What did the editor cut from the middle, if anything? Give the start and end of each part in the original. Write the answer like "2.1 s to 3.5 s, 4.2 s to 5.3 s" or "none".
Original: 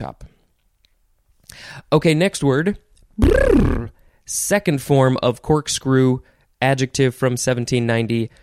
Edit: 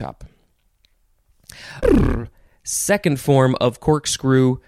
1.8 s to 3.4 s